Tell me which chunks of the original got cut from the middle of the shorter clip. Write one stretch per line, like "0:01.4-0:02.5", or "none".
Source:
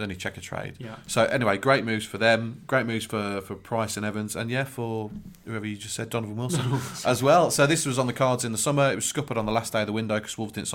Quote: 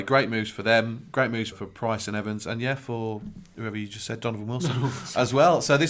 0:03.1-0:03.4